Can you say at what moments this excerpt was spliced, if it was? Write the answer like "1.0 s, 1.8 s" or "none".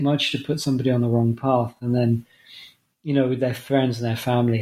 none